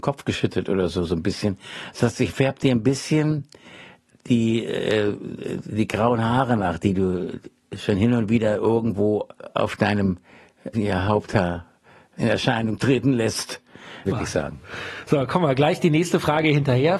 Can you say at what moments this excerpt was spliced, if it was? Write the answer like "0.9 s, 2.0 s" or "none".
10.7 s, 14.0 s